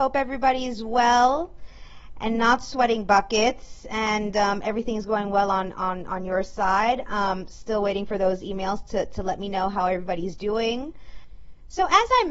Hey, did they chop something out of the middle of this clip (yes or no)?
no